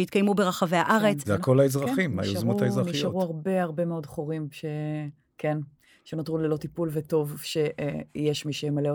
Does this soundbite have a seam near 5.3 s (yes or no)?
no